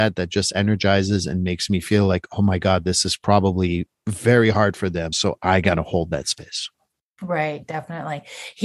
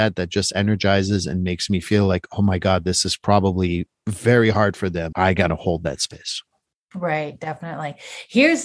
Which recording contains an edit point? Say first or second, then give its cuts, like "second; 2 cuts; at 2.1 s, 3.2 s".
second; 1 cut; at 5.1 s